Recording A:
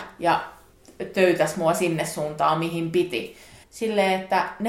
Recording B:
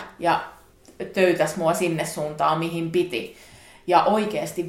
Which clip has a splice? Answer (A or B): A